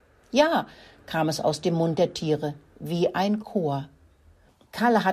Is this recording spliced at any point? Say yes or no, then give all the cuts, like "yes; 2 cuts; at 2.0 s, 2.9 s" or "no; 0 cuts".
no; 0 cuts